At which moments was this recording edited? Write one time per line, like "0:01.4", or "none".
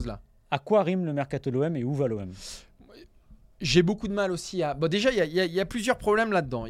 none